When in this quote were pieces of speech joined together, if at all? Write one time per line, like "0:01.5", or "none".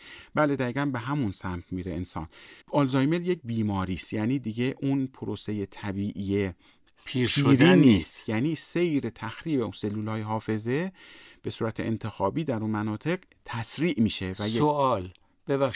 0:02.6

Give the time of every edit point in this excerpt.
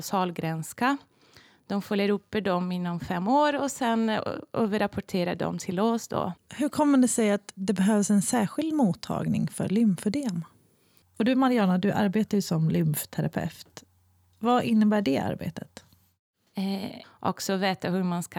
0:06.4
0:11.0
0:17.0

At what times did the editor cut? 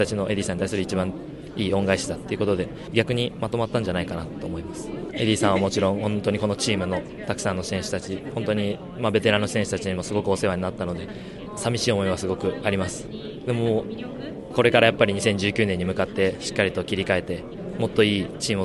none

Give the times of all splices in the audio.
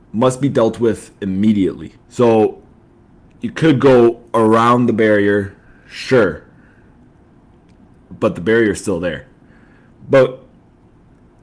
0:02.0
0:09.9

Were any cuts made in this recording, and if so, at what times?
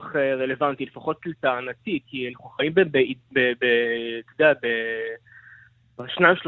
none

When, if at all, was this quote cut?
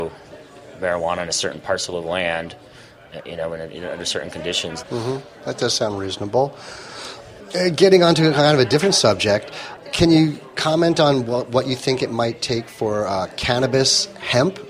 0:04.8

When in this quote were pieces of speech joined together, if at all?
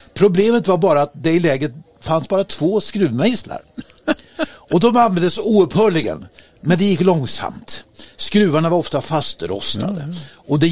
none

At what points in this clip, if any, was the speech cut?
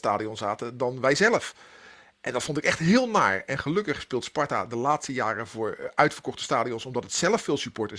none

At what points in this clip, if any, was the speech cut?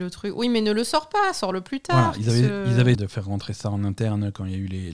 0:02.9

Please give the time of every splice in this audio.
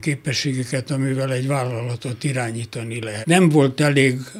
0:03.2

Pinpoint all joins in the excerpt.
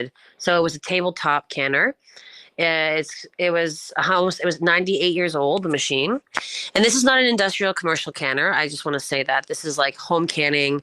none

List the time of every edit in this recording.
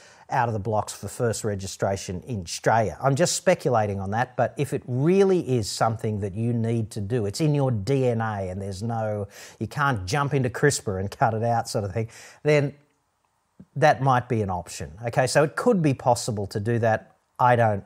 none

